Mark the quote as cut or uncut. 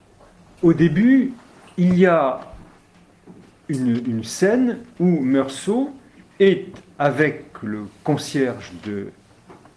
uncut